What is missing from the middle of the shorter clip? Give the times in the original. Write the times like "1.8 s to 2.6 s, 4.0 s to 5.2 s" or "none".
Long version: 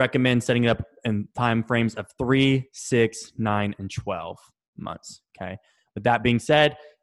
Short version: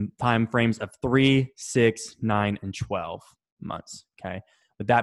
none